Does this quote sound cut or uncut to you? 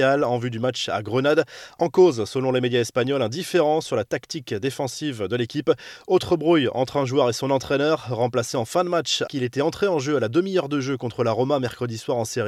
cut